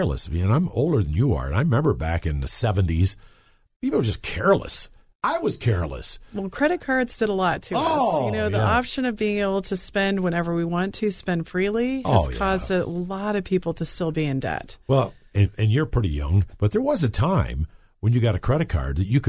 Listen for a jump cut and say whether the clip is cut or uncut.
uncut